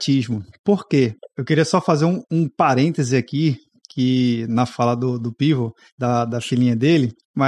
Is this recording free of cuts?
no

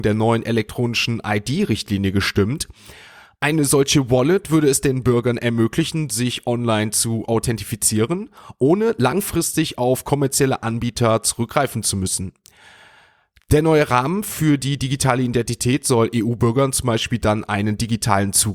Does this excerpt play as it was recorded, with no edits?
yes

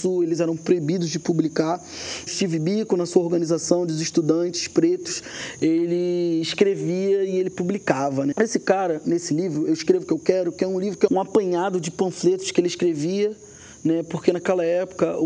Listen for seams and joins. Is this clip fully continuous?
no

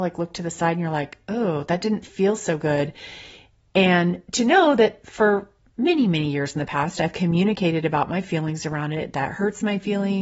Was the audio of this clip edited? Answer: no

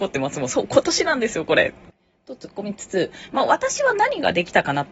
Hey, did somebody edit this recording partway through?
no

